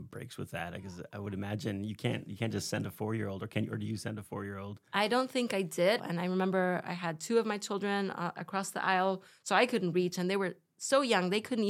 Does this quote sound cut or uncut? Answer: cut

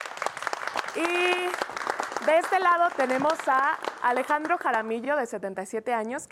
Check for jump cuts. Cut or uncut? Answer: uncut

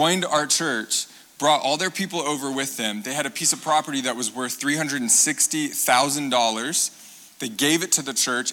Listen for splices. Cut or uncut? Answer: uncut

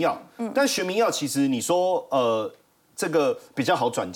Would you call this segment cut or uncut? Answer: uncut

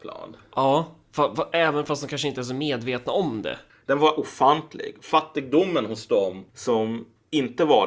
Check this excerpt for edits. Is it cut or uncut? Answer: cut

